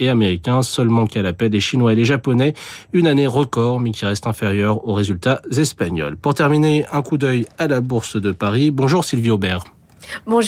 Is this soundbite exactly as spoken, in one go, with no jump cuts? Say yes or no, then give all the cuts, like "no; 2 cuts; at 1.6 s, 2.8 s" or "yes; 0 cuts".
yes; 0 cuts